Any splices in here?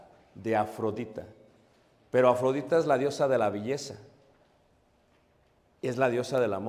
no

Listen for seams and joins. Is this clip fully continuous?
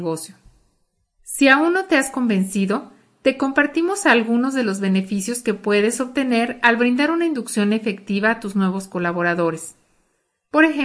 no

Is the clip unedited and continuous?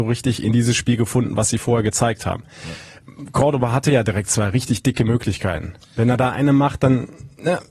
yes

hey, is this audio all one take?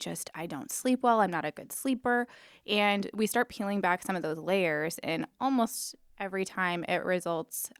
yes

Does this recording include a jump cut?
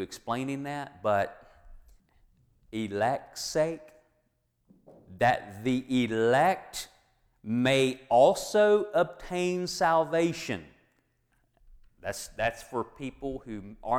no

